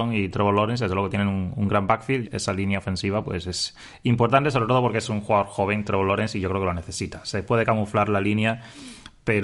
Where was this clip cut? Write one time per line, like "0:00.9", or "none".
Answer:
0:02.2